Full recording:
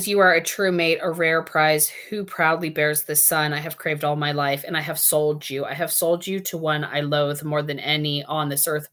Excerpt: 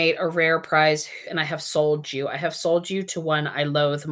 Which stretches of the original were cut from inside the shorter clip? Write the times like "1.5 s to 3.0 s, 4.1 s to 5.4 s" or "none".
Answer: 2.1 s to 4.6 s